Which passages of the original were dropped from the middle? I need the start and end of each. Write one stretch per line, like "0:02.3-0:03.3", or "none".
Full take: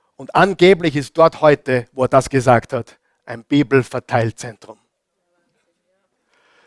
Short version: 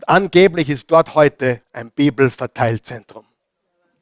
0:01.9-0:03.2